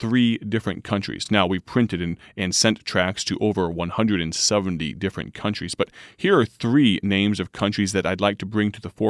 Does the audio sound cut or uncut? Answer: uncut